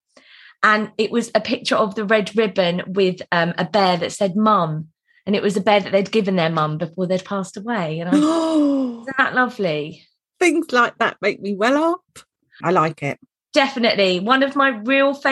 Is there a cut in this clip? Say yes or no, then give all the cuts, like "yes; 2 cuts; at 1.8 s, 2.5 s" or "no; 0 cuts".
yes; 1 cut; at 12.6 s